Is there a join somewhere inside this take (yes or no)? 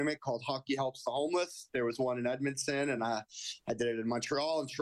no